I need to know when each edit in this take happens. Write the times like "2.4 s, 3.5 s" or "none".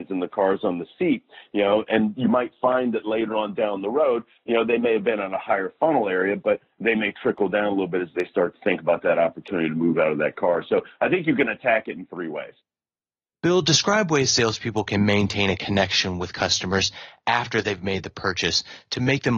1.9 s